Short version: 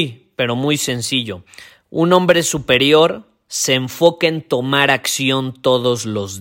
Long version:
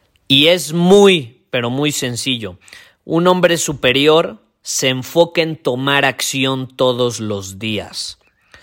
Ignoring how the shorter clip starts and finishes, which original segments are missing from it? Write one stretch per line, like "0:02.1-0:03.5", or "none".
none